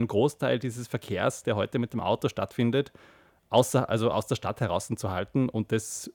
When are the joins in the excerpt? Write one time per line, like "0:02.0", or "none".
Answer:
none